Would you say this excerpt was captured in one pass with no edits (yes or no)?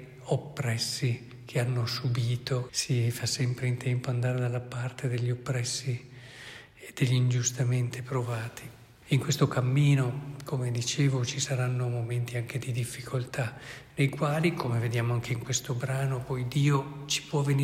no